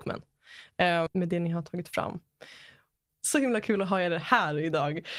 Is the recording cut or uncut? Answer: cut